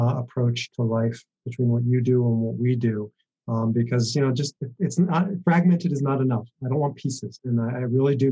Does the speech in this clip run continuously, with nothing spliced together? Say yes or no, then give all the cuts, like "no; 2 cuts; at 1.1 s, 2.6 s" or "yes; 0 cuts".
no; 2 cuts; at 4.6 s, 7.4 s